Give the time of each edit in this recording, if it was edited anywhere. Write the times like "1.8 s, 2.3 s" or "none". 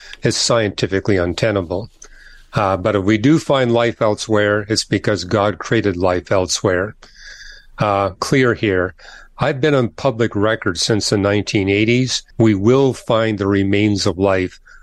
8.2 s, 12.3 s